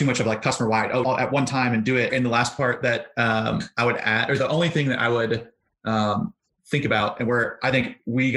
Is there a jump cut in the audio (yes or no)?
yes